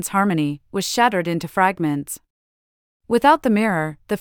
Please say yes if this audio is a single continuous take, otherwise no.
yes